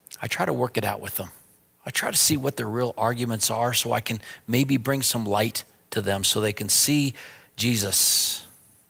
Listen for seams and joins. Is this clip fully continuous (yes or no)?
yes